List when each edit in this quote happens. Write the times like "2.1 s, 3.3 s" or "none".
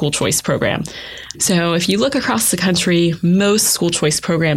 1.3 s